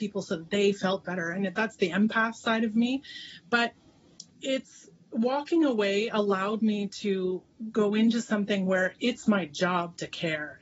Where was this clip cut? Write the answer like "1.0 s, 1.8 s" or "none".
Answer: 4.3 s